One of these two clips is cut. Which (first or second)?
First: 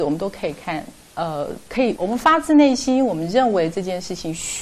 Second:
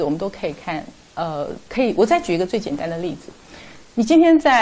first